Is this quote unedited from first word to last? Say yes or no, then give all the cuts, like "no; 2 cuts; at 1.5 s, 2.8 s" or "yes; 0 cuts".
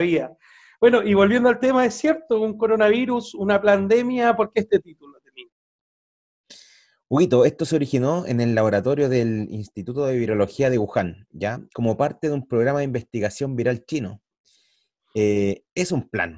yes; 0 cuts